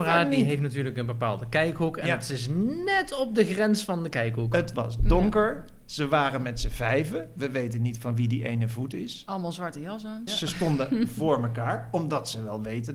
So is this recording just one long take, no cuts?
no; 1 cut; at 10.3 s

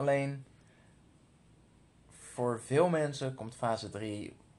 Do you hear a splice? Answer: no; 0 cuts

